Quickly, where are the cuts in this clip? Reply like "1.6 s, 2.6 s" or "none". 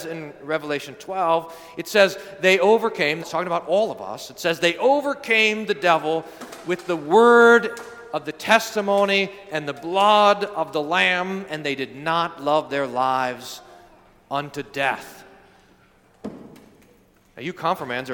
3.2 s

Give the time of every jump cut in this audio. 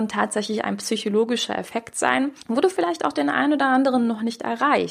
2.4 s

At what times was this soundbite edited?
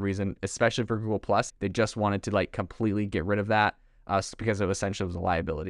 1.5 s

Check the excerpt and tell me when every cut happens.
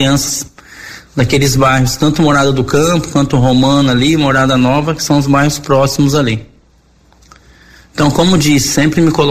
none

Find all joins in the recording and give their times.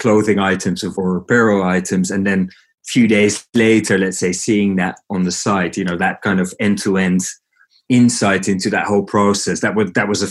none

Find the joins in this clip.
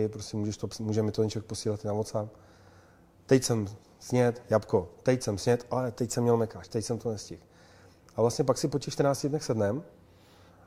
none

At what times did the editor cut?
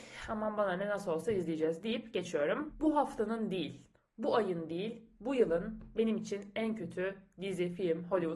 none

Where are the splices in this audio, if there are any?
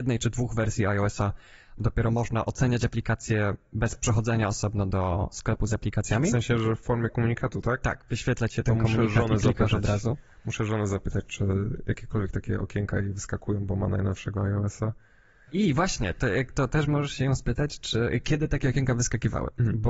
15.5 s

